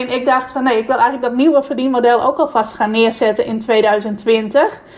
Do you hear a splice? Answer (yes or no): no